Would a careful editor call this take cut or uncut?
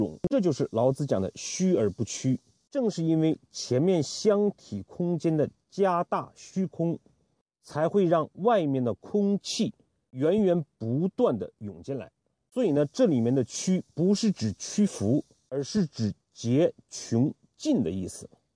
uncut